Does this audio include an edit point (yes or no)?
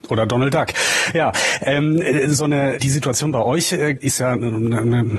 yes